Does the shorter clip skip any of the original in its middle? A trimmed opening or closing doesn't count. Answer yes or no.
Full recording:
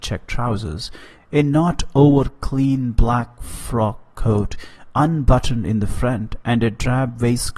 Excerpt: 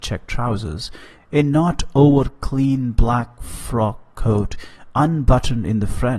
no